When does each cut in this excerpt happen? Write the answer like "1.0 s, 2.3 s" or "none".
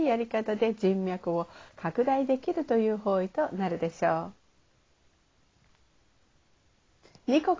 none